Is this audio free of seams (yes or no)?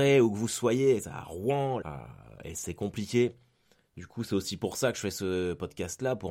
no